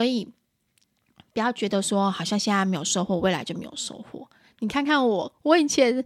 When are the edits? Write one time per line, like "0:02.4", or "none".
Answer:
none